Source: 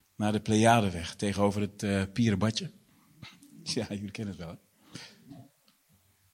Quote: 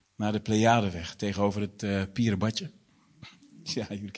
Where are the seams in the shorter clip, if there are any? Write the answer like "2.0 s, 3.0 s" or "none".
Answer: none